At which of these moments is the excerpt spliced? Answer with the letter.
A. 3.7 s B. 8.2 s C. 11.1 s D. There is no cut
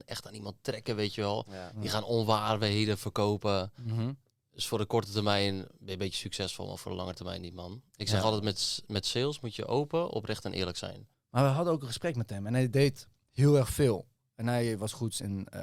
C